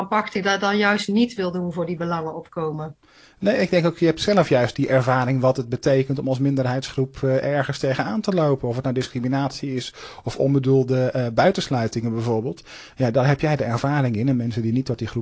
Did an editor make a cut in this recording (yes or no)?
no